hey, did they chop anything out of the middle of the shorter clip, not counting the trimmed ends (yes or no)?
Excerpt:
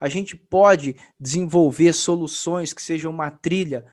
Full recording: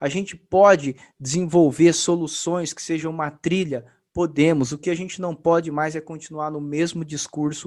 no